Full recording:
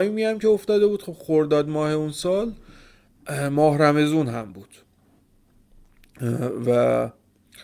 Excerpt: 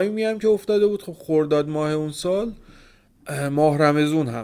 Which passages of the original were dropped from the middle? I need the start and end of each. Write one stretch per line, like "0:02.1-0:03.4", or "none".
none